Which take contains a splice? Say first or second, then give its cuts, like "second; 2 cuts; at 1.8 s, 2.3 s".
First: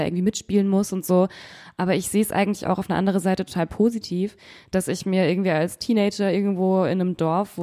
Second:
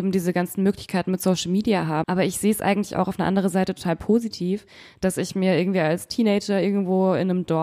second; 1 cut; at 2.0 s